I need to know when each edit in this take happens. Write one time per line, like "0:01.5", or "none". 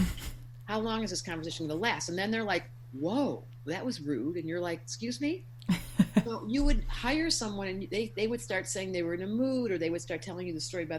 0:06.3

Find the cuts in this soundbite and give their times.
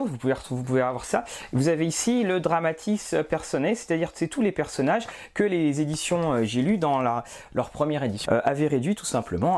0:08.2

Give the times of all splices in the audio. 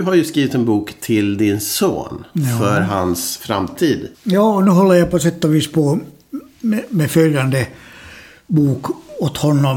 0:04.1

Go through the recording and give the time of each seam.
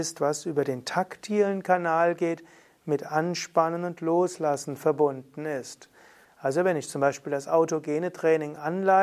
0:06.2

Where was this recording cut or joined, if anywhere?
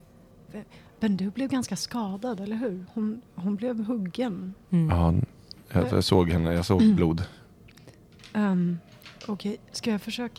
none

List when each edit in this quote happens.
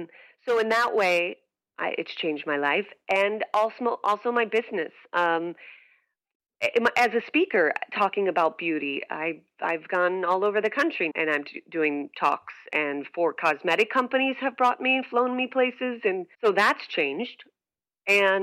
0:11.1
0:16.3

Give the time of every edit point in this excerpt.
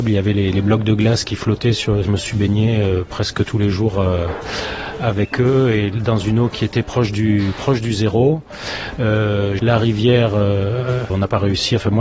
0:02.0
0:09.6
0:11.1

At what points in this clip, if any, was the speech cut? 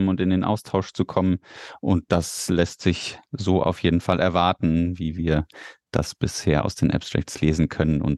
none

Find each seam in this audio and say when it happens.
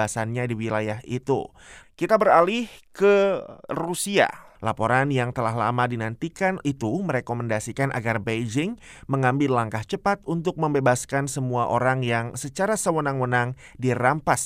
0:01.8
0:04.5

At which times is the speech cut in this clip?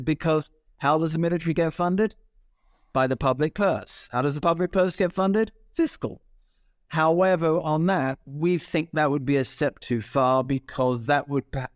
none

